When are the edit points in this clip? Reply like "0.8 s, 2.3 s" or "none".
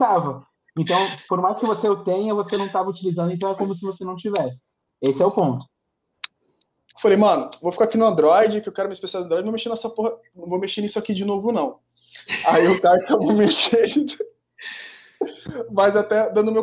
6.9 s